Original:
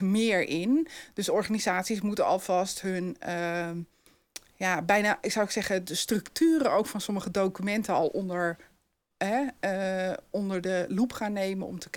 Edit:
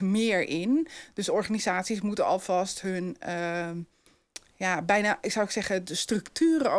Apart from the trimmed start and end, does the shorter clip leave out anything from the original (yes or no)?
no